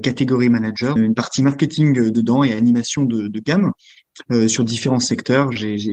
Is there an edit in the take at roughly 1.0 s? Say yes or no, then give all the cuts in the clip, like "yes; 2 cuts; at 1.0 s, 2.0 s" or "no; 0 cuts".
yes; 1 cut; at 1.0 s